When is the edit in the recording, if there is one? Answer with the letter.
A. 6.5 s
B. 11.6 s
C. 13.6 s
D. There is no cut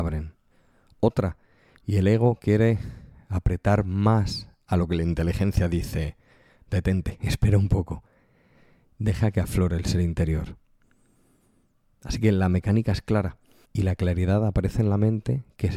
C